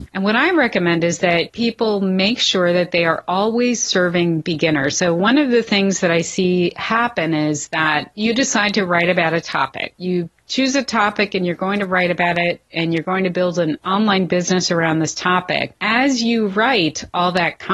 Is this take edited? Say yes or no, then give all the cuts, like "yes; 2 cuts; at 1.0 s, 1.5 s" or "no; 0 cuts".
no; 0 cuts